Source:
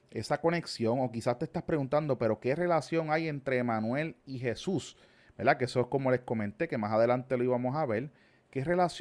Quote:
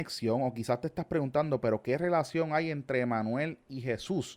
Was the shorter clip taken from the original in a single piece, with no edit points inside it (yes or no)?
yes